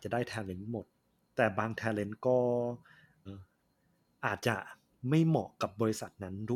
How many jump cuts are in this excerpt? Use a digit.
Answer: 2